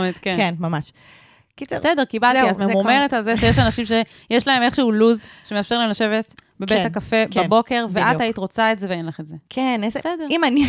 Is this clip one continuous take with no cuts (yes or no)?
yes